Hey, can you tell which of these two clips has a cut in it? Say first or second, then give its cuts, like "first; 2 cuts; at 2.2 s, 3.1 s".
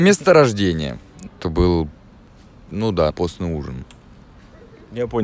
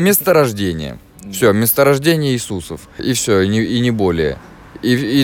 first; 2 cuts; at 1.3 s, 3.1 s